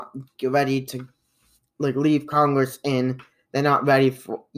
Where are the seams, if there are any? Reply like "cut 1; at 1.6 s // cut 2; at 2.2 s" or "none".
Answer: none